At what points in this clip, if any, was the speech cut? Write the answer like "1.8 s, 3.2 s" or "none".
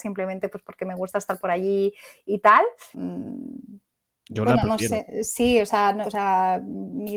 2.9 s, 6.0 s